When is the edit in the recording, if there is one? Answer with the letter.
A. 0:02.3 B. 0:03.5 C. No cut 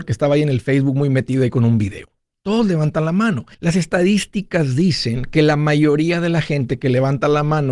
B